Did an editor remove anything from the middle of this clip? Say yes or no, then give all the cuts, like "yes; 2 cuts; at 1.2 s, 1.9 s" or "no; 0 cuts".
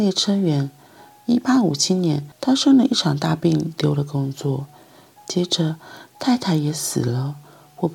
no; 0 cuts